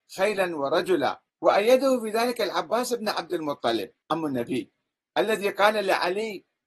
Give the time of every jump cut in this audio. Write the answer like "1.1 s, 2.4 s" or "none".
1.3 s, 4.0 s